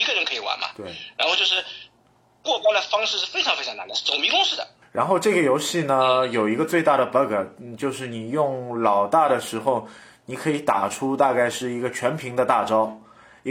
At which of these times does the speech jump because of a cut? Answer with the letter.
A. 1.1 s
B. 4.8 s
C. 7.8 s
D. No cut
B